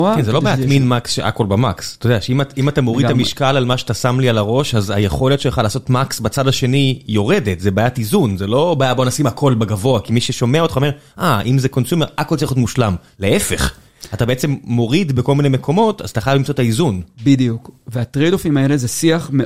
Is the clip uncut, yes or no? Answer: yes